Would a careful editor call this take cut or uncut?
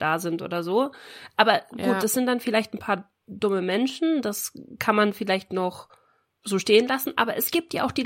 uncut